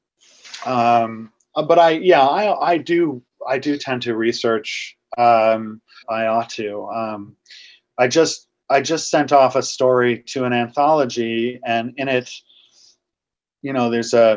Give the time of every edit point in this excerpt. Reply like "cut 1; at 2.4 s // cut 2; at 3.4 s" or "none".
cut 1; at 6.0 s